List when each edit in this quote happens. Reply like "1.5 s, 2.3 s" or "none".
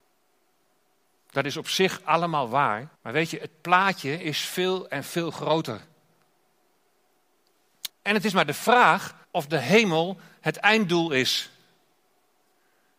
2.9 s, 7.9 s, 9.2 s